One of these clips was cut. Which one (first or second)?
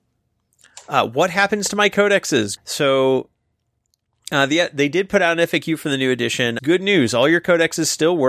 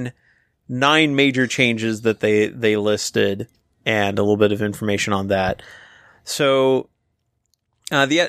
first